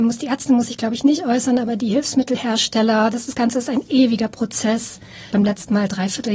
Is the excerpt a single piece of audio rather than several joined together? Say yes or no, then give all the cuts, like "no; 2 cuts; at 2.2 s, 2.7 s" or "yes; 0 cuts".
no; 1 cut; at 5.3 s